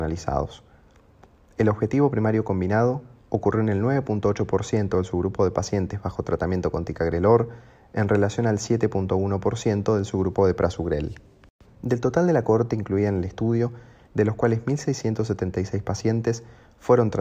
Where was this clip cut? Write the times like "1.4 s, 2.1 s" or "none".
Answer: 11.6 s, 14.0 s

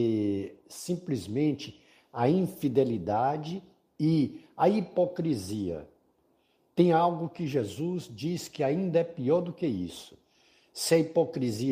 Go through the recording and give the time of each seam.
none

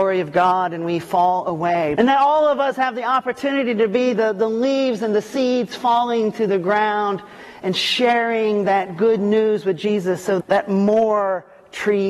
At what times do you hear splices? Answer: 2.0 s, 10.4 s

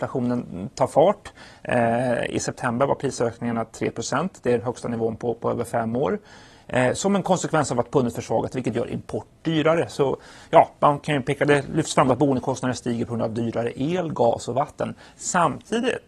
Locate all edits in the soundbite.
none

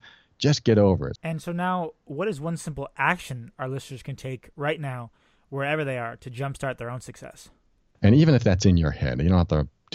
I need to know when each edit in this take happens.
1.2 s, 8.0 s

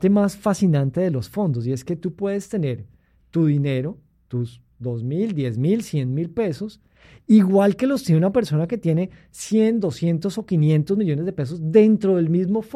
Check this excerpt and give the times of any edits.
none

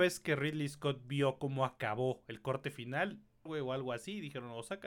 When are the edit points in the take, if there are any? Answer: 3.5 s

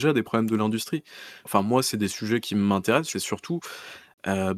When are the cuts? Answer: 1.5 s, 3.1 s

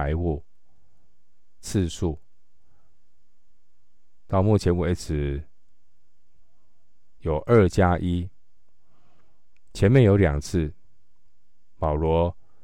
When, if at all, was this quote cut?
1.6 s

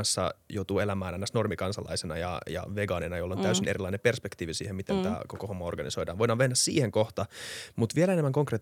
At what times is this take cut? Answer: none

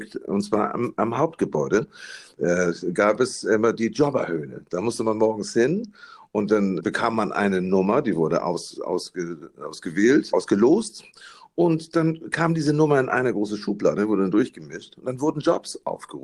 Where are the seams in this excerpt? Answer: 6.8 s, 10.3 s

